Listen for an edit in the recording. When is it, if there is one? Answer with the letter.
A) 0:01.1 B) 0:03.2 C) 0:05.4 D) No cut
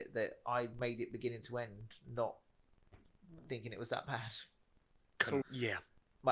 C